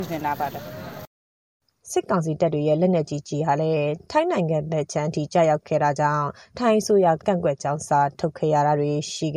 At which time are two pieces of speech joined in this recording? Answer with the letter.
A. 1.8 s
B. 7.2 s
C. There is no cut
B